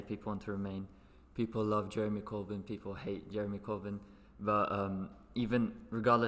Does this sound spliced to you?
no; 0 cuts

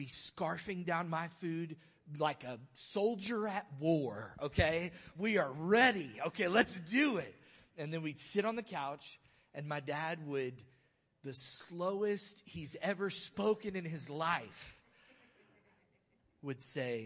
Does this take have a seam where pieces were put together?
no; 0 cuts

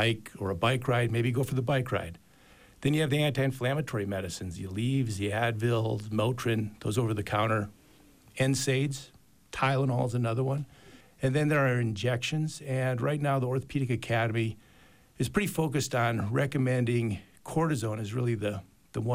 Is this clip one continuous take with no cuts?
yes; 0 cuts

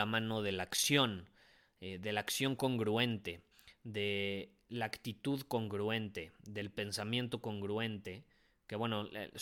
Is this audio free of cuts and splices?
yes; 0 cuts

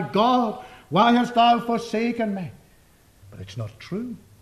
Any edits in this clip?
yes; 1 cut; at 3.2 s

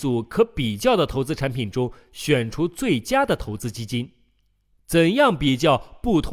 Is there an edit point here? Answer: no; 0 cuts

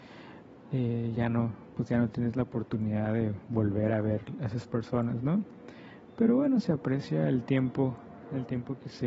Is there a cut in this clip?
no; 0 cuts

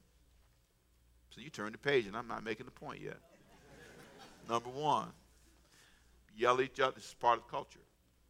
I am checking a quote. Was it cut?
yes; 1 cut; at 6.3 s

